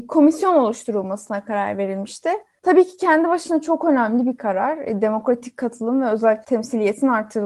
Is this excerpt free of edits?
yes; 0 cuts

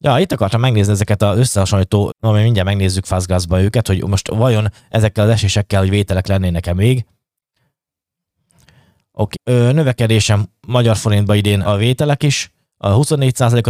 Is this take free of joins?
no; 3 cuts; at 2.1 s, 9.3 s, 11.6 s

